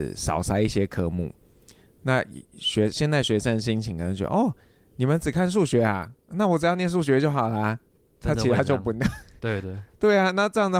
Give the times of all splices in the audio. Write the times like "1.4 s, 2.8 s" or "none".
9.6 s